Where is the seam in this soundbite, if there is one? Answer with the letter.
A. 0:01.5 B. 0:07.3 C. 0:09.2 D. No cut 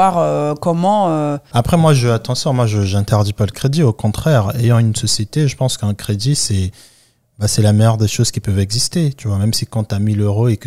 A